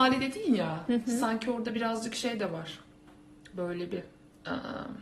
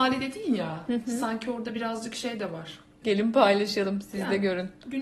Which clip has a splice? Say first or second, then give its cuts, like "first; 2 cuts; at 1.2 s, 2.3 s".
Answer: second; 1 cut; at 3.0 s